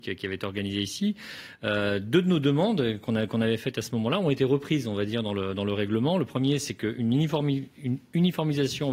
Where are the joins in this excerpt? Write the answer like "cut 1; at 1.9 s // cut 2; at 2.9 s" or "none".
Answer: none